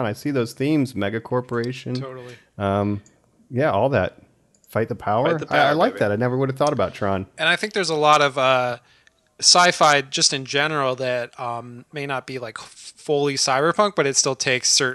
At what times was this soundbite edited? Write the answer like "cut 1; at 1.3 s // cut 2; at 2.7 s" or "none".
none

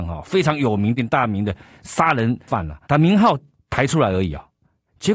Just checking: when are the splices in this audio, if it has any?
cut 1; at 1.0 s // cut 2; at 2.8 s

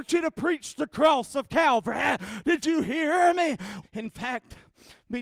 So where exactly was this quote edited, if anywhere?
cut 1; at 3.8 s

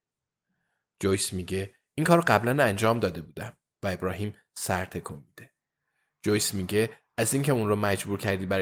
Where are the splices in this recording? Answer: none

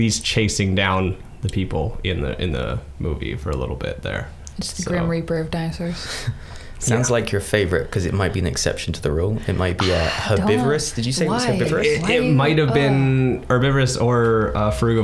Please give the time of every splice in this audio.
none

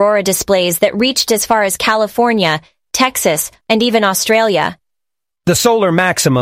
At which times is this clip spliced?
cut 1; at 3.6 s // cut 2; at 5.3 s

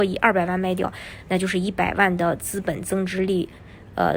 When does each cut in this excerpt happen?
none

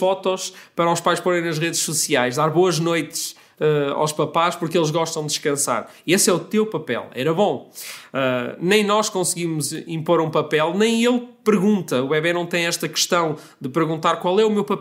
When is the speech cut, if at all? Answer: none

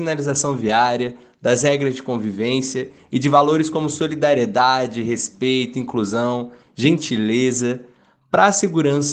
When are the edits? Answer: none

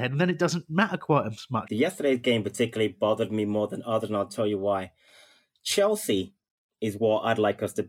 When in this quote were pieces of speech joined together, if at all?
cut 1; at 1.7 s

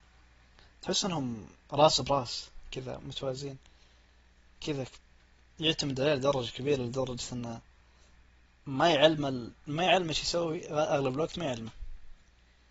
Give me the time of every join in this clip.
none

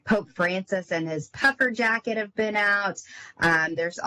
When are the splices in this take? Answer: none

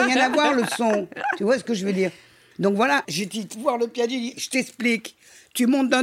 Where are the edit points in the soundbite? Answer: cut 1; at 3.0 s // cut 2; at 4.3 s

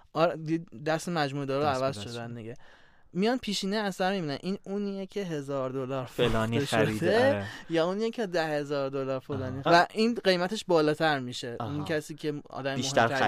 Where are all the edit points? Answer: cut 1; at 9.7 s

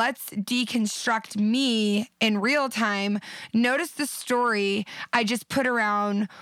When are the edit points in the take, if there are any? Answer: none

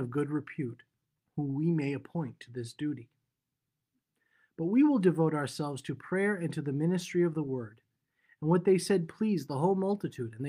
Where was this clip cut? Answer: cut 1; at 1.2 s

